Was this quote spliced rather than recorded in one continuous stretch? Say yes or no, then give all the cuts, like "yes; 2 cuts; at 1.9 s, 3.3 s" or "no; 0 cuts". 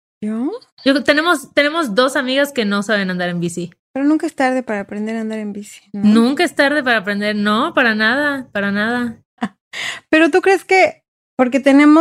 yes; 2 cuts; at 3.8 s, 9.4 s